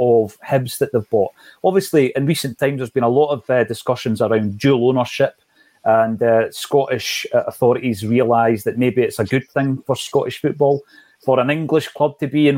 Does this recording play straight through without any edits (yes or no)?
yes